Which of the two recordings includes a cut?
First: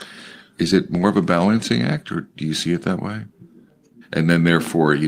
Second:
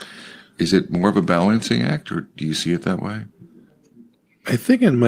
first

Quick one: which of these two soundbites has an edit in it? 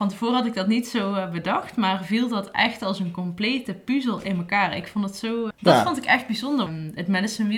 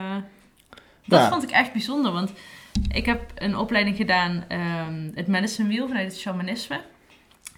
first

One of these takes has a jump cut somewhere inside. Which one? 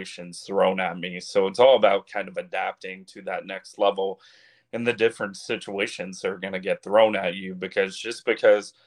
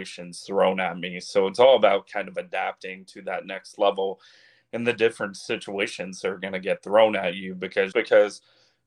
second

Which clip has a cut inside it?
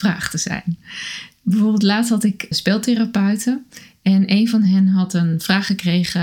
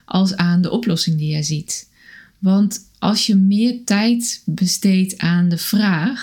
first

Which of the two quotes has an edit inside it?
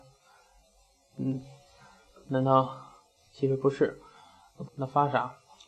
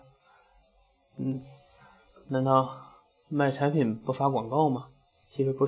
first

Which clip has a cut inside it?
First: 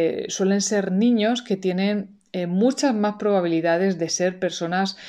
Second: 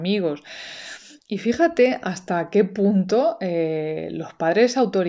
second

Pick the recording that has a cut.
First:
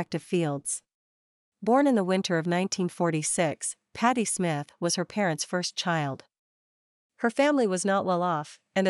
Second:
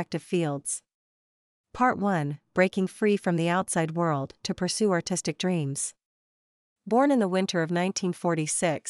first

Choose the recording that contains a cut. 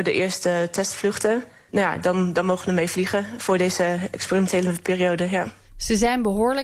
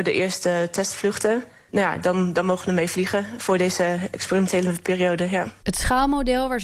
second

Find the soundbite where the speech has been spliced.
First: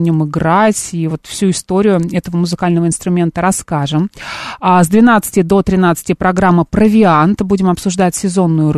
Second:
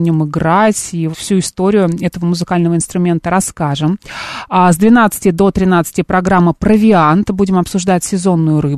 second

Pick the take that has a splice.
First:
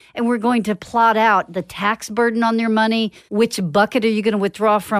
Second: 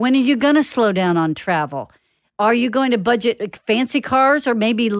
first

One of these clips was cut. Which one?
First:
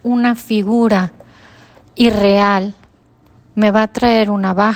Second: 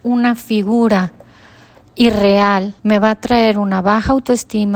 second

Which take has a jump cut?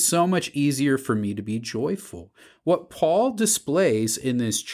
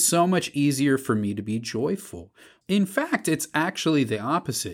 second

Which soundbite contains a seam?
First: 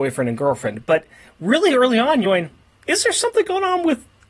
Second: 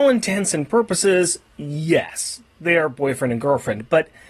first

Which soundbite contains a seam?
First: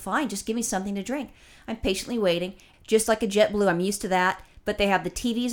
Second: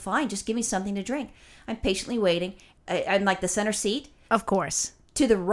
first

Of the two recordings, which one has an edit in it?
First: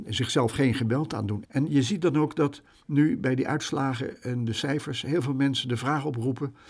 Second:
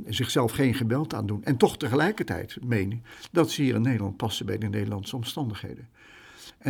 first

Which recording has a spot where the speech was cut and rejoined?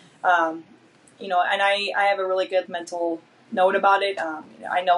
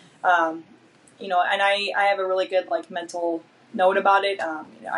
first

